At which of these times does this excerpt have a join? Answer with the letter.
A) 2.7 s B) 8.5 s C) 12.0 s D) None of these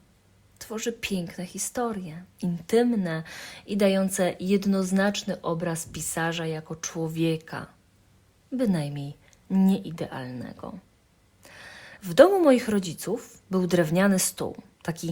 C